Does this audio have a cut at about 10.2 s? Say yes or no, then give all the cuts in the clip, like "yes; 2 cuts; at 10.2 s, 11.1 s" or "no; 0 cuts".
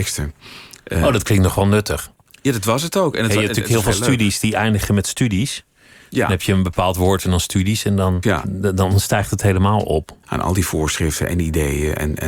yes; 2 cuts; at 8.2 s, 10.2 s